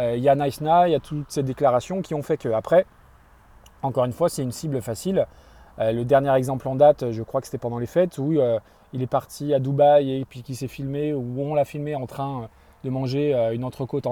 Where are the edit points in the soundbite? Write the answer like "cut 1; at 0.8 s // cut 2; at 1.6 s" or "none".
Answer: none

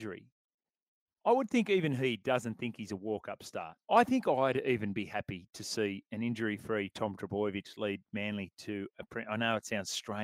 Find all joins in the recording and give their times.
cut 1; at 3.8 s

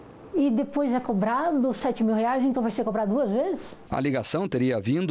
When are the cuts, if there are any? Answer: none

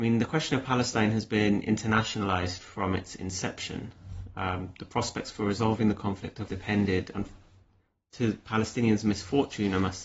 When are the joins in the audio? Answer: cut 1; at 6.5 s

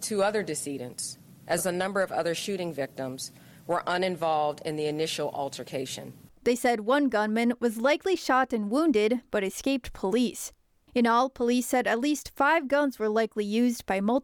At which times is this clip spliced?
cut 1; at 1.6 s

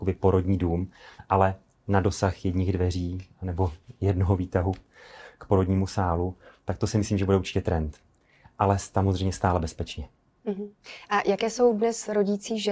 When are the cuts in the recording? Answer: none

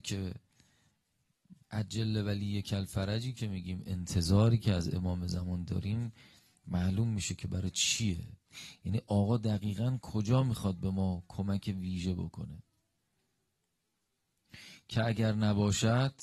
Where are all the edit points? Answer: cut 1; at 1.6 s

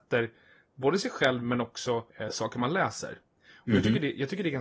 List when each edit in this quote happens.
cut 1; at 2.1 s

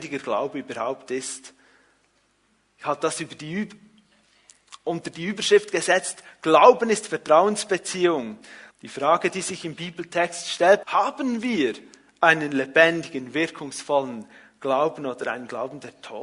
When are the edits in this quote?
cut 1; at 8.7 s // cut 2; at 10.8 s

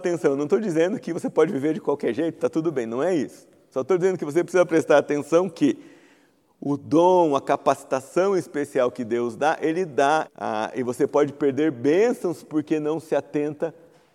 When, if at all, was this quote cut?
cut 1; at 10.2 s

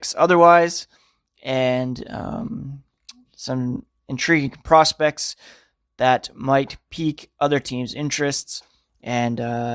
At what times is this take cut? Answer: none

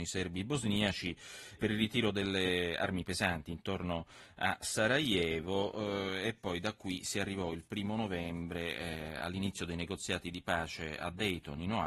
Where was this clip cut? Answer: cut 1; at 1.6 s

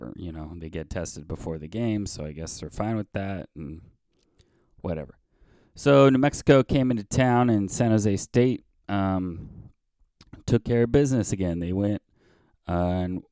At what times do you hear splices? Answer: none

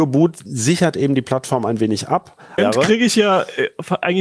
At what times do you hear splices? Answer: cut 1; at 2.6 s

